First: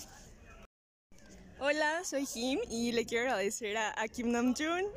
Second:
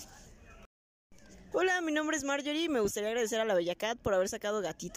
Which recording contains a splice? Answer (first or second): second